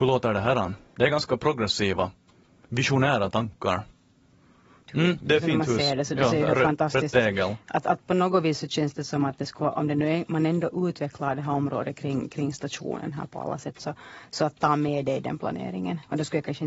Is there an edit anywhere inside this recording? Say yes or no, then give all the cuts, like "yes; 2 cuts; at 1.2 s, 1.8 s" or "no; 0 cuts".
yes; 1 cut; at 4.9 s